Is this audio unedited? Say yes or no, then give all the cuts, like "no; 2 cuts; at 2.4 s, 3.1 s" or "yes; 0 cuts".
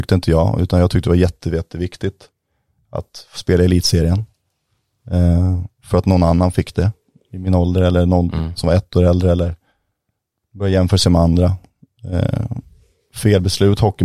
yes; 0 cuts